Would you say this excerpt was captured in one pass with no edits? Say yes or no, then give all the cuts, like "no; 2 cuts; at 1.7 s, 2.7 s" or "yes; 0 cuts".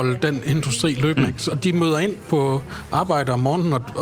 yes; 0 cuts